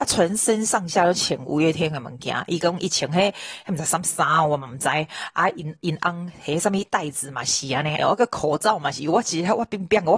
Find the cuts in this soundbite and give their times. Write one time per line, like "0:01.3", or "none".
0:08.0

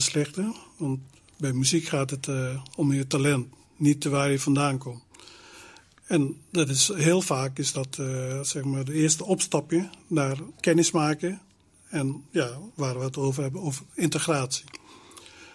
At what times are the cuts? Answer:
0:10.6

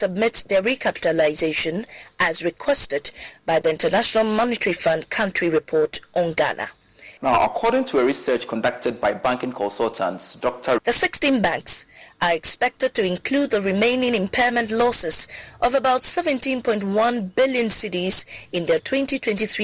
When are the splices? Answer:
0:07.2
0:10.8

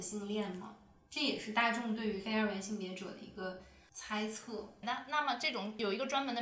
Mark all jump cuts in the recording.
0:04.8

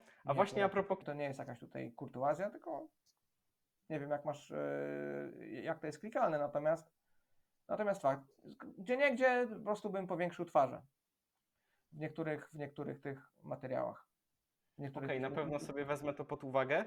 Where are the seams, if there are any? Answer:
0:01.0

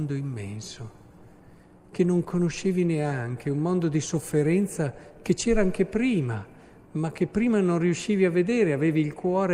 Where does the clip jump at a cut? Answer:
none

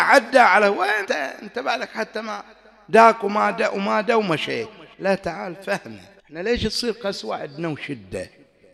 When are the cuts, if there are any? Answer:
0:01.0
0:04.9
0:06.2

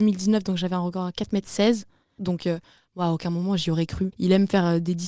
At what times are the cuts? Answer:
0:02.2
0:04.1

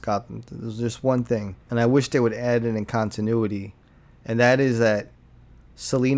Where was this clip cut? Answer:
0:01.6

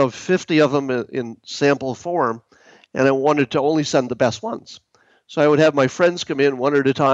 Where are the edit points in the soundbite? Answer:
none

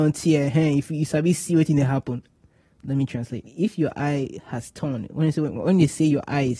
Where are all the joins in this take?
none

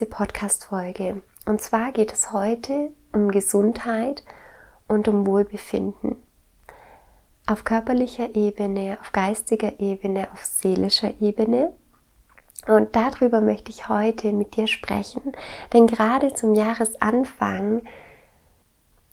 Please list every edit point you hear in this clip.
none

